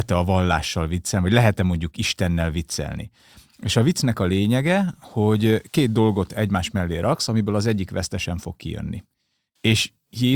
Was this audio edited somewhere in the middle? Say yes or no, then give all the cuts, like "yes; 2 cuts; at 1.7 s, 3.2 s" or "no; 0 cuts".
no; 0 cuts